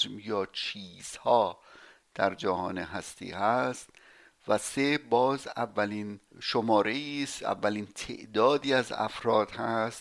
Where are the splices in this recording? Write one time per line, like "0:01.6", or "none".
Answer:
0:06.3